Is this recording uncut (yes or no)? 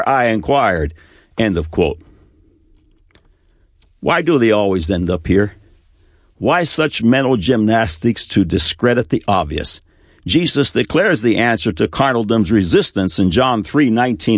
yes